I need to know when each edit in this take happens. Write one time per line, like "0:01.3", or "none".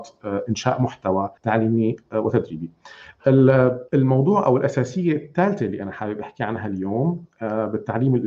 0:01.4
0:03.9